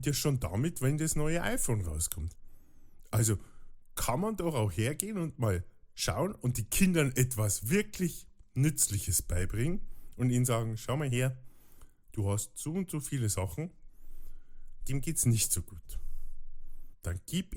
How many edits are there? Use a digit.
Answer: 1